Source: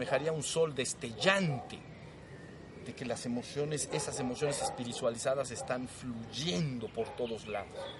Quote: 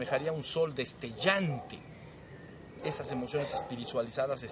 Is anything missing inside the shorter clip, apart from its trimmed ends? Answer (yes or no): yes